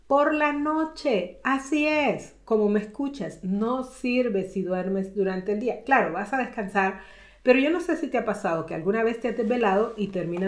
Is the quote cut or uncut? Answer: uncut